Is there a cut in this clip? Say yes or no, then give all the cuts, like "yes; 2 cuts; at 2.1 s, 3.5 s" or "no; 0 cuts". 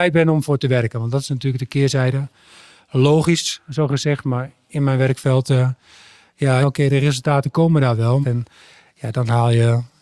yes; 2 cuts; at 6.6 s, 8.2 s